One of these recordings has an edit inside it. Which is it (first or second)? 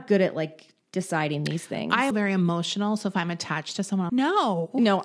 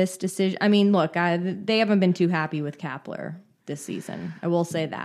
first